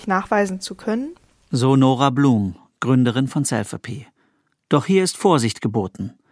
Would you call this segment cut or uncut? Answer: cut